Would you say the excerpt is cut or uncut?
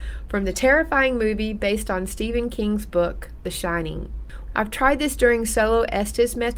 cut